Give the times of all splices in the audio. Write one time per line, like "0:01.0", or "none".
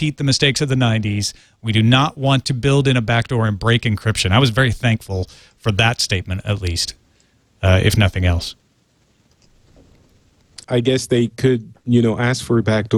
0:10.6